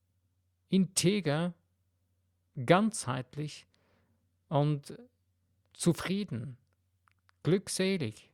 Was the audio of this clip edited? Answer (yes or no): no